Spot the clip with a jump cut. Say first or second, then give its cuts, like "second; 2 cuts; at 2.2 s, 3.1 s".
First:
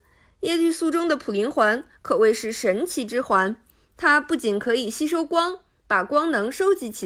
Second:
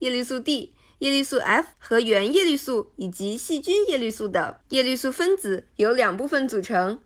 second; 2 cuts; at 1.7 s, 4.6 s